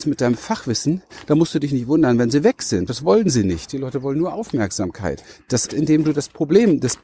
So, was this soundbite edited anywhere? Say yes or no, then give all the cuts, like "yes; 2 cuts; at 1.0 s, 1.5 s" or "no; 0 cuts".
yes; 2 cuts; at 2.9 s, 5.7 s